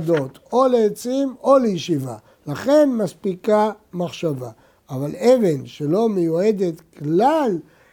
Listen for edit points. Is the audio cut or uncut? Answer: uncut